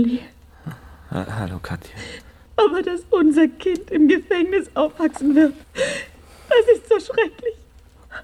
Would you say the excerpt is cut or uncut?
cut